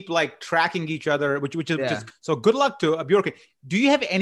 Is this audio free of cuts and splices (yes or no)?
no